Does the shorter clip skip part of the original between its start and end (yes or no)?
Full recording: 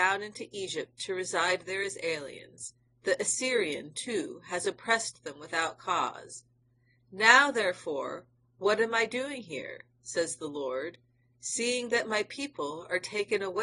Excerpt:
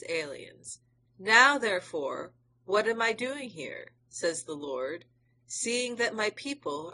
yes